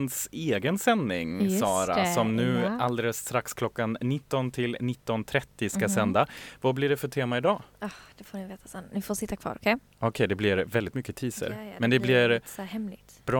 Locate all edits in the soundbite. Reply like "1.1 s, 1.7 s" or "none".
none